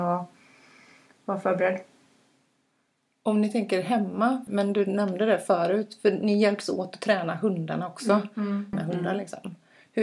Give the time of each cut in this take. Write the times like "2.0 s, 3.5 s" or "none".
4.5 s, 8.7 s